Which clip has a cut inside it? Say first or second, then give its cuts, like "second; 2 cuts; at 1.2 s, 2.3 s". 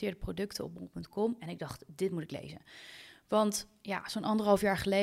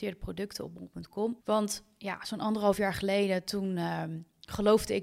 second; 1 cut; at 1.4 s